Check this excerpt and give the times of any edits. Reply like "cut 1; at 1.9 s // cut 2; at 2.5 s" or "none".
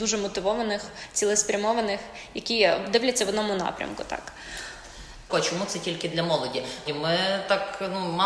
cut 1; at 5.3 s // cut 2; at 6.9 s

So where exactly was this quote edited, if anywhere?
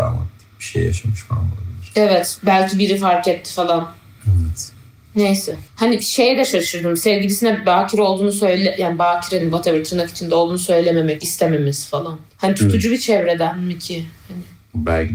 cut 1; at 5.7 s

